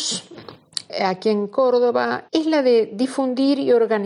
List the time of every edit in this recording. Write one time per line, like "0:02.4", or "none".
0:02.3